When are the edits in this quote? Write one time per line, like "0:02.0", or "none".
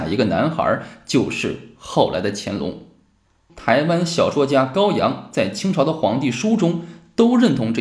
0:03.5